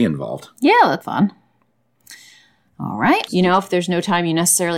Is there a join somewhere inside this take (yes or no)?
yes